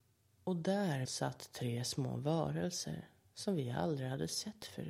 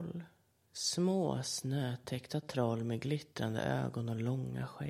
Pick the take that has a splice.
first; 1 cut; at 1.0 s

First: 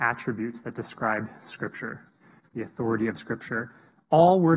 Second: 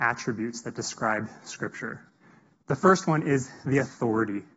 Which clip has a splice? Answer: first; 1 cut; at 2.4 s

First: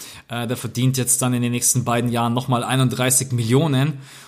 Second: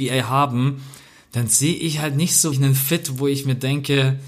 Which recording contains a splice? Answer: second; 1 cut; at 2.5 s

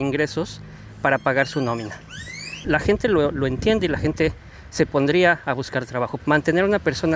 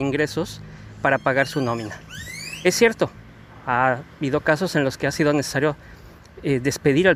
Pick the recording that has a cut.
first; 2 cuts; at 2.6 s, 6.2 s

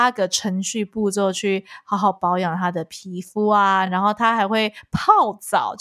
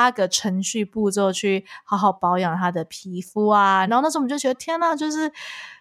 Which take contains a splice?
second; 1 cut; at 3.9 s

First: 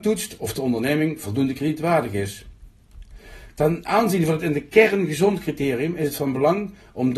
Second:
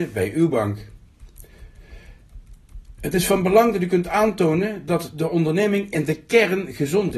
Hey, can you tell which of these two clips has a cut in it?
second; 1 cut; at 3.0 s

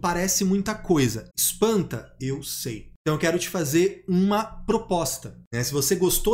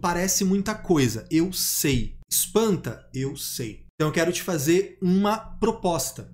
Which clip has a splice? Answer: first; 1 cut; at 1.3 s

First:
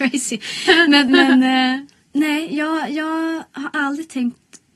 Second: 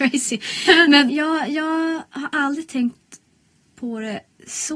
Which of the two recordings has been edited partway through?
second; 1 cut; at 1.1 s

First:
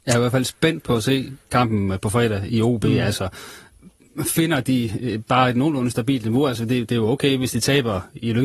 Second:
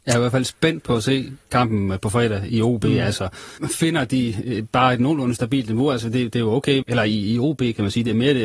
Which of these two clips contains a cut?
second; 2 cuts; at 3.6 s, 6.8 s

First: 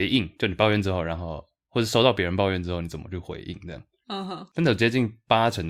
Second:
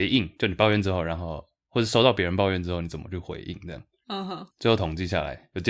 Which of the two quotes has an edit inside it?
second; 1 cut; at 4.5 s

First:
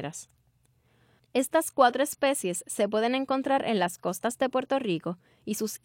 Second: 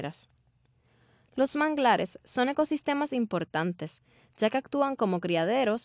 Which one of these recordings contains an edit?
first; 1 cut; at 1.2 s

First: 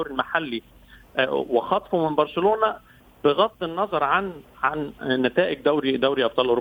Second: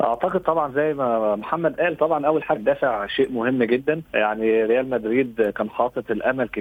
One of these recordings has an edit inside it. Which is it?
second; 2 cuts; at 2.6 s, 4.1 s

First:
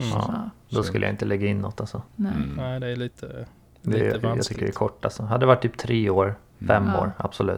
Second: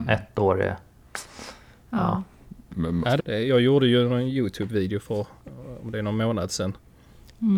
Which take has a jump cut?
second; 1 cut; at 3.2 s

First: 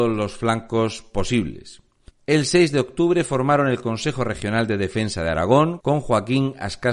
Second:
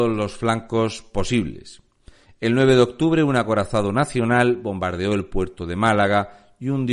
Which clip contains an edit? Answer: first; 2 cuts; at 2.1 s, 5.8 s

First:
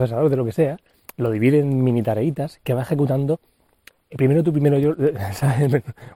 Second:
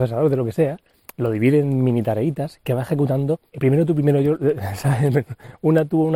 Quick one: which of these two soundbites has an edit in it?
second; 1 cut; at 3.5 s

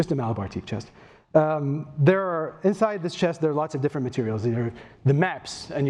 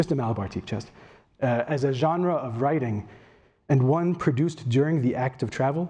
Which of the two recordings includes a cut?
second; 1 cut; at 1.3 s

